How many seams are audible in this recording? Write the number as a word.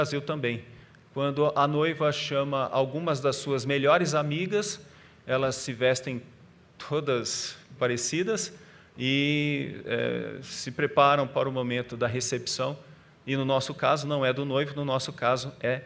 one